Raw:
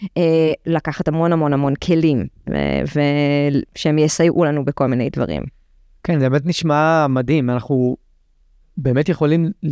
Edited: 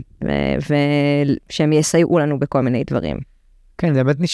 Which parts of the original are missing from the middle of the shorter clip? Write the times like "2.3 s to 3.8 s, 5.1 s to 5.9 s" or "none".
none